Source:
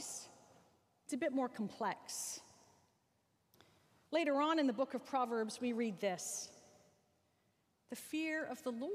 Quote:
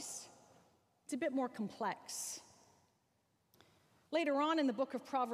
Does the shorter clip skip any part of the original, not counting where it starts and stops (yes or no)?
no